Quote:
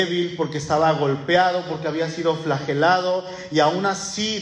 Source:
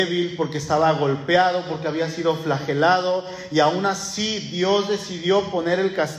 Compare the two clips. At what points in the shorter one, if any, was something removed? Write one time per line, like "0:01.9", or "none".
none